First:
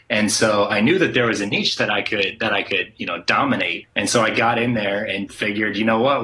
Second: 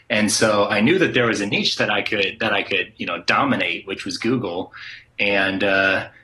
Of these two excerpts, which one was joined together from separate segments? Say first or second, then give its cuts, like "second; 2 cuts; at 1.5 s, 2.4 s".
first; 2 cuts; at 3.8 s, 5.3 s